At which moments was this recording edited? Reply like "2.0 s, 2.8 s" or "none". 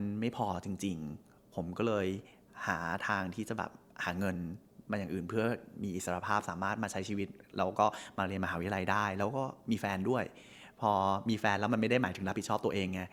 4.8 s

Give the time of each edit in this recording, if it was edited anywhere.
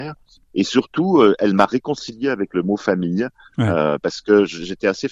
none

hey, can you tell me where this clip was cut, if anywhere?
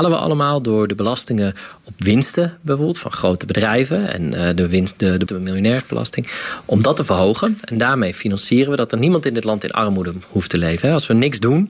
5.3 s

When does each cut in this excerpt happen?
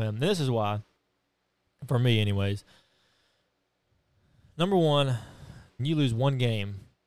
5.8 s

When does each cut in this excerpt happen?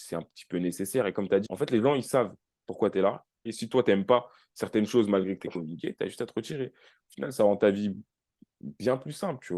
1.5 s, 3.5 s

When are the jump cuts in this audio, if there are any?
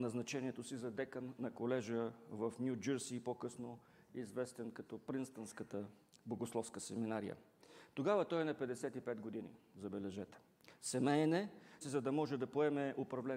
11.8 s

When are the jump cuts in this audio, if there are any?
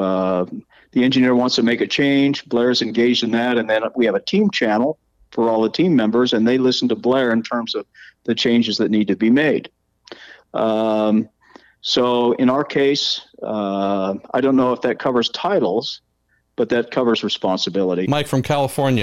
18.0 s

